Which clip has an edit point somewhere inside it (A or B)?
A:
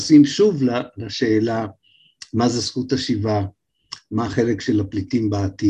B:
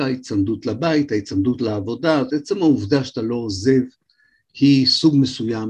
B